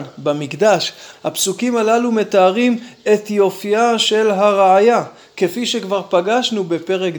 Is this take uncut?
no; 1 cut; at 1.1 s

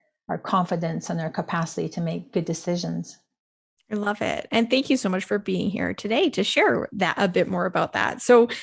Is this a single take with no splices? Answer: yes; 0 cuts

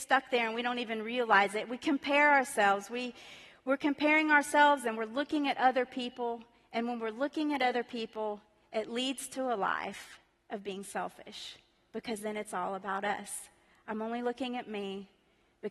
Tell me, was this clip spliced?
no; 0 cuts

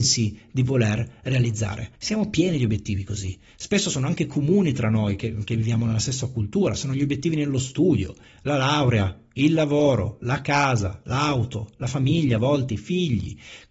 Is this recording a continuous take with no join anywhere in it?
no; 1 cut; at 2.0 s

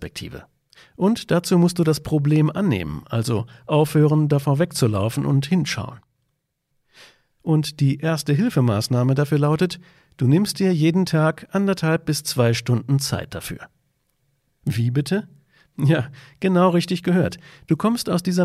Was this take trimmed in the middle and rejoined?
no; 0 cuts

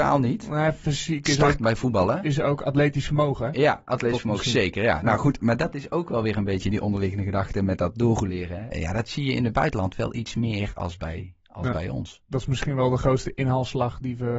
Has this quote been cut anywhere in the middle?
yes; 1 cut; at 8.7 s

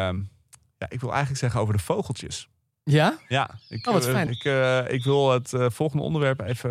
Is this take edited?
yes; 1 cut; at 4.3 s

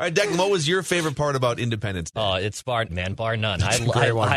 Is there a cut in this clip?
yes; 1 cut; at 2.9 s

